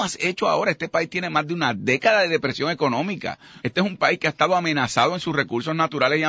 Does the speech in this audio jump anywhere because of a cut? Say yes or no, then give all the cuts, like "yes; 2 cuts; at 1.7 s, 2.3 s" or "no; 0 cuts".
yes; 1 cut; at 3.6 s